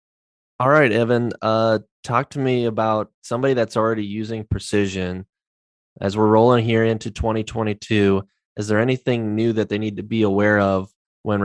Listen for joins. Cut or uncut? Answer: uncut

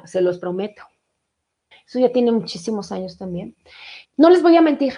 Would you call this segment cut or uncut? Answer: cut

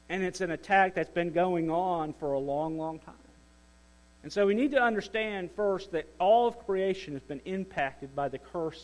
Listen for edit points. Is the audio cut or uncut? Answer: cut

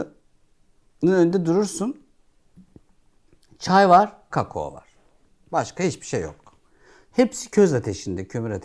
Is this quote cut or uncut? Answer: cut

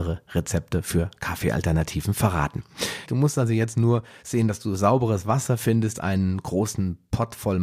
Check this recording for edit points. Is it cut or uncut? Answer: cut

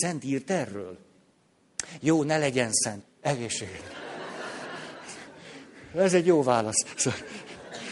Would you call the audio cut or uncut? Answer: cut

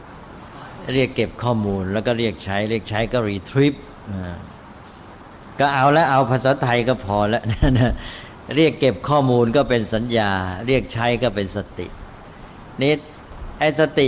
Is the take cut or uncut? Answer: uncut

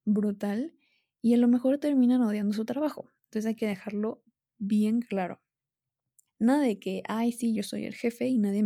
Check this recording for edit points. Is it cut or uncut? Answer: cut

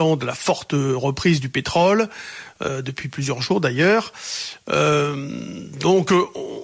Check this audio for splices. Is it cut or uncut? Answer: uncut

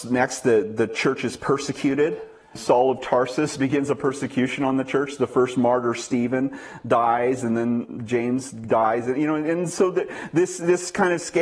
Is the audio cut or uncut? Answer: uncut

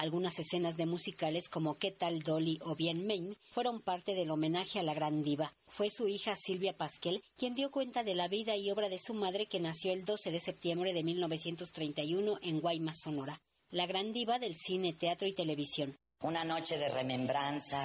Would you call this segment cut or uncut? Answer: uncut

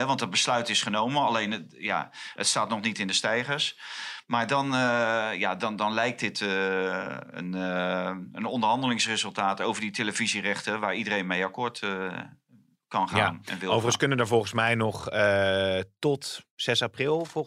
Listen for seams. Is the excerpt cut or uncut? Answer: uncut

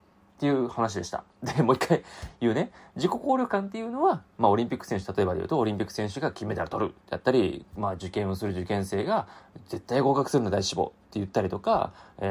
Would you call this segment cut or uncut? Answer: uncut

